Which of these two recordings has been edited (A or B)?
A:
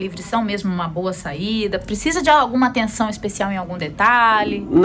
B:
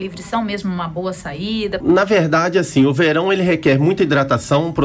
B